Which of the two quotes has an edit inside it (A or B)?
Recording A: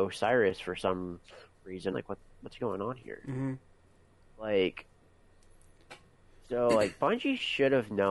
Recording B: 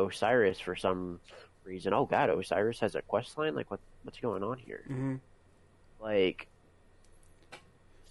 A